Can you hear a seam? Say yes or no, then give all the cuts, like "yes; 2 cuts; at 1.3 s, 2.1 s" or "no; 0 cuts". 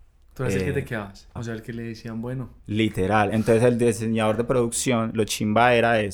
yes; 2 cuts; at 1.4 s, 2.6 s